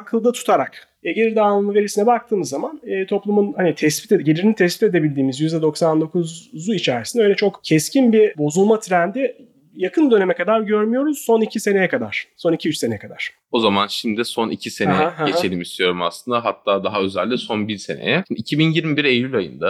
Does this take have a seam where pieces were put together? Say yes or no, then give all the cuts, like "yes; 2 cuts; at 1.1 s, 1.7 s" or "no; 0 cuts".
no; 0 cuts